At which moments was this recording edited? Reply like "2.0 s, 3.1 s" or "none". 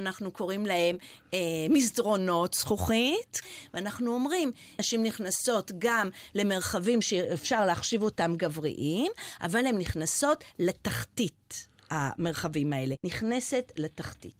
4.8 s

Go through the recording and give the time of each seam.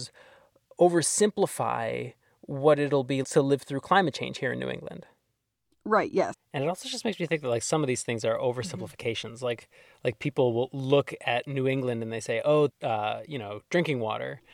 3.2 s, 6.3 s, 12.7 s

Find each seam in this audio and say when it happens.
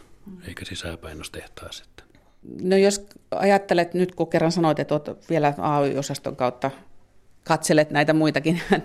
none

